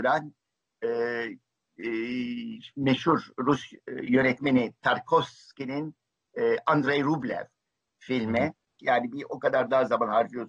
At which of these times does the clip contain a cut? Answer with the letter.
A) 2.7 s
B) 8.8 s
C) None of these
B